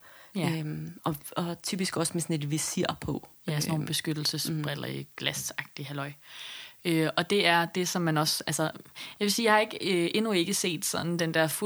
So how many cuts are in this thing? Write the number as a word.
zero